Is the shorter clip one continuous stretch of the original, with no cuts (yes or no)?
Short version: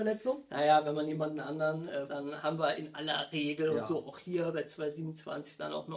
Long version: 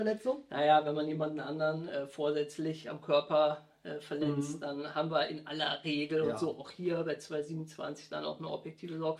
no